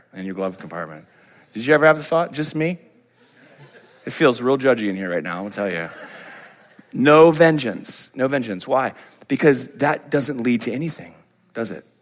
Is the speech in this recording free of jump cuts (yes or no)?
yes